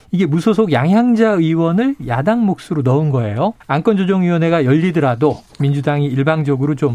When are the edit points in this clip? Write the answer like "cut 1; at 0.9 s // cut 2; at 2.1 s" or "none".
cut 1; at 3.6 s